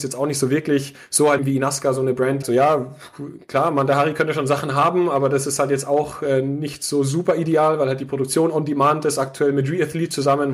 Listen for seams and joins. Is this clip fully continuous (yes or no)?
no